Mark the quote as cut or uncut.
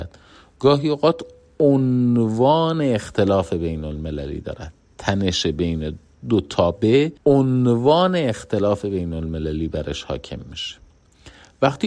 cut